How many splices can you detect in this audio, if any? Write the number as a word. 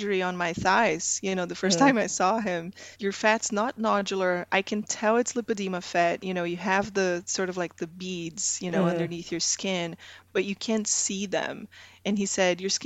one